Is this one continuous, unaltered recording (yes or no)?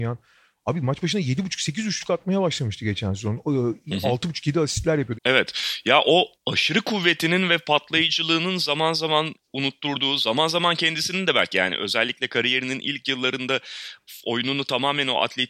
no